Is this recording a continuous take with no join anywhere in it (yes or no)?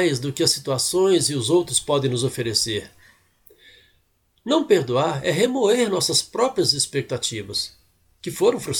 yes